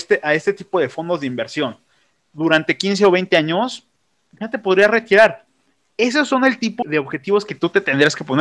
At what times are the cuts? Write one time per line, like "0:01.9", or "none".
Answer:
0:06.8